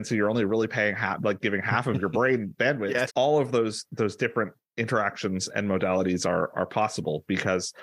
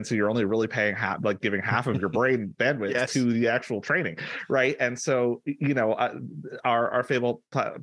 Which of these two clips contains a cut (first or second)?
first